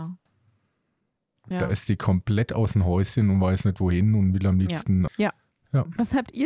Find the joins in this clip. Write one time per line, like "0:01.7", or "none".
0:01.5
0:05.1

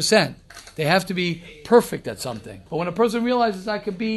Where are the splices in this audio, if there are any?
0:02.7

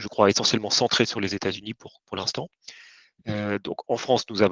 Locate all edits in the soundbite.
none

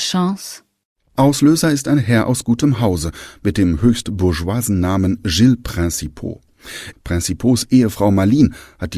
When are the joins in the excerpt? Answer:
0:06.9

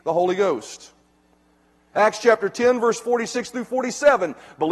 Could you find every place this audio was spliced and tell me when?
0:01.9

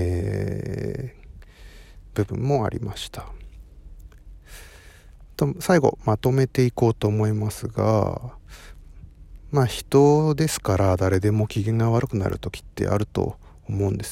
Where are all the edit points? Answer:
none

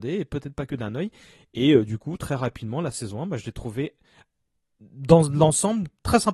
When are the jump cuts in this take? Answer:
none

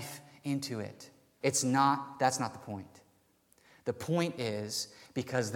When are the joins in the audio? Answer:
0:01.4

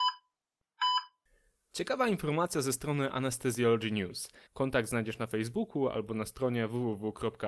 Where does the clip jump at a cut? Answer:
0:04.5

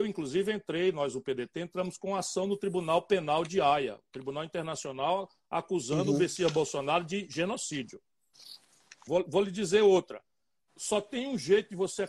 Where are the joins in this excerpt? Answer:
0:09.1

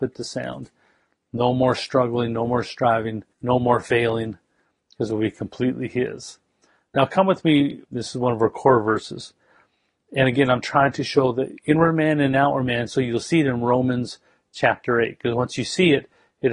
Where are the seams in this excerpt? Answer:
0:03.3
0:07.8

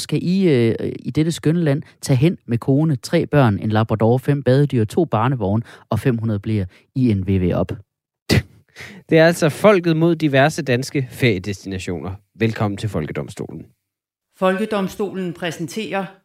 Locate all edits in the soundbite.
none

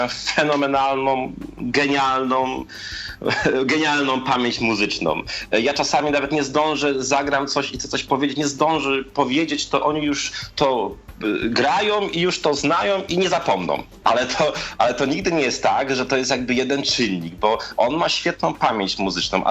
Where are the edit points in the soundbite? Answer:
0:14.0

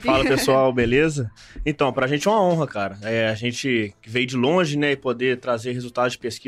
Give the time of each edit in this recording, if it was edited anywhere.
none

